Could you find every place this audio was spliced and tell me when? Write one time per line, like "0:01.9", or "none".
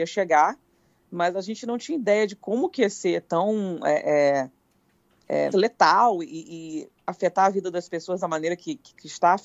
0:05.5